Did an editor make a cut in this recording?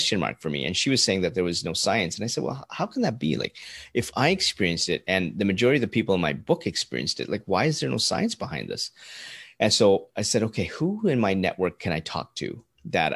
no; 0 cuts

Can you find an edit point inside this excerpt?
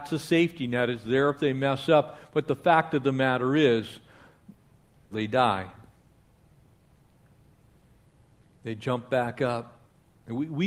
yes; 1 cut; at 5.1 s

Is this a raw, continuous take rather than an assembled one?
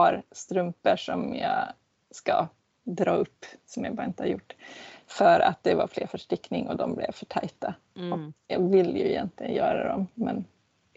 no; 1 cut; at 8.5 s

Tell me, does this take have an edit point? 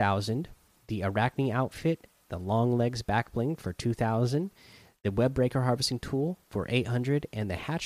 no; 0 cuts

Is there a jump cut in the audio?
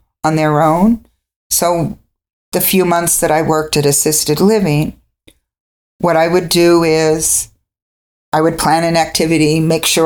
no; 0 cuts

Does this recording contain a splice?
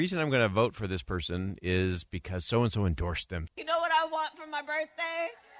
yes; 1 cut; at 3.5 s

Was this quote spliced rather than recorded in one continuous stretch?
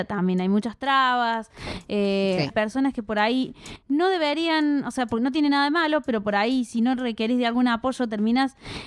yes; 1 cut; at 2.5 s

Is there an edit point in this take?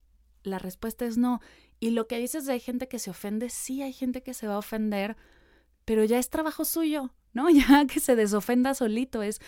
no; 0 cuts

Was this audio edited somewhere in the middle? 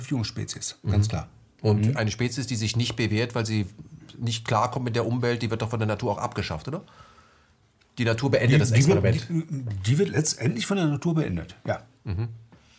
no; 0 cuts

